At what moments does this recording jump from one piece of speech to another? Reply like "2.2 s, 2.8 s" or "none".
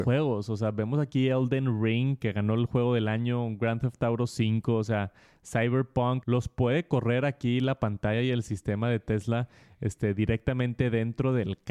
6.2 s